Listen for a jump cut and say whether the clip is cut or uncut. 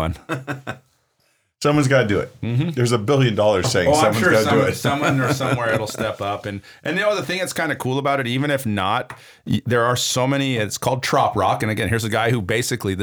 uncut